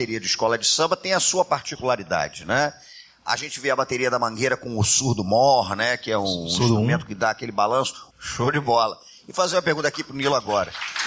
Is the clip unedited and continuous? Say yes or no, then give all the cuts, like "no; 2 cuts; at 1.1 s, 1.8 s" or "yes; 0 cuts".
no; 1 cut; at 8.1 s